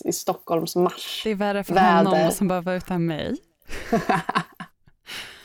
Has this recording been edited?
no; 0 cuts

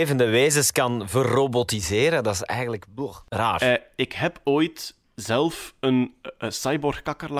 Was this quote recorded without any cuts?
yes; 0 cuts

